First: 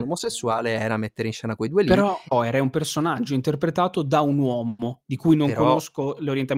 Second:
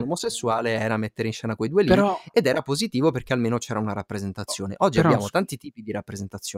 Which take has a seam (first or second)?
first